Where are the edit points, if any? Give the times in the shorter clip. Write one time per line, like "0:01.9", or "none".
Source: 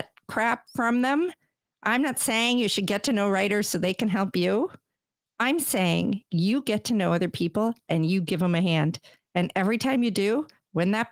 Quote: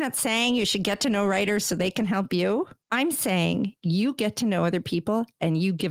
0:02.8